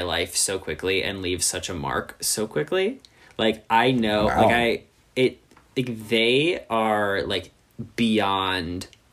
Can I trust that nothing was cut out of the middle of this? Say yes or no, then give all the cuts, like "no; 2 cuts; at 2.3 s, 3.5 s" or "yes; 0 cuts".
yes; 0 cuts